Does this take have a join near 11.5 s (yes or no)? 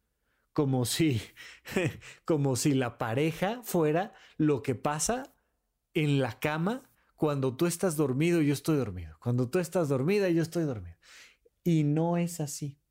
yes